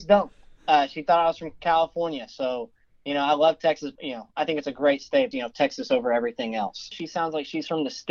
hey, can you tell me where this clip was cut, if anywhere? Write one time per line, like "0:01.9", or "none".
0:04.0
0:05.3
0:06.9